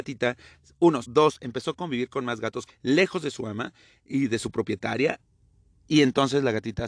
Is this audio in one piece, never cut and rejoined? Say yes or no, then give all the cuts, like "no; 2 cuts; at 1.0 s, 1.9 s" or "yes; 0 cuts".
no; 2 cuts; at 1.0 s, 2.7 s